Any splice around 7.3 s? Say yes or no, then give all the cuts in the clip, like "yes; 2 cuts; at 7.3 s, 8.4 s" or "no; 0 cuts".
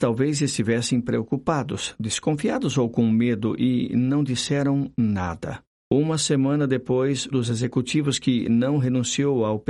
yes; 2 cuts; at 5.8 s, 7.3 s